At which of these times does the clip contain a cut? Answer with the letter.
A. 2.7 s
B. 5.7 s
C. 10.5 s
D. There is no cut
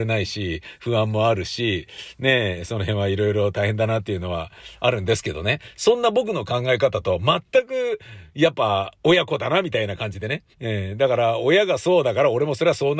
C